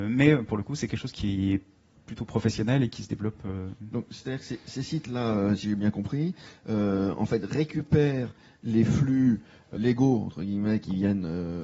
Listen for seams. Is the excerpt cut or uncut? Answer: cut